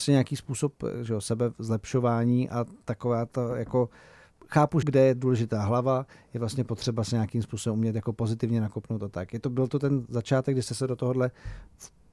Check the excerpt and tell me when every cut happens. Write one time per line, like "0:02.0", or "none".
0:04.8